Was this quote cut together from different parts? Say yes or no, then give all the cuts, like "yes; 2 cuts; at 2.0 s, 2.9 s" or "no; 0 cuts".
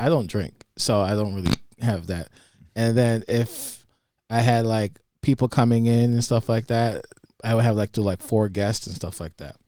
no; 0 cuts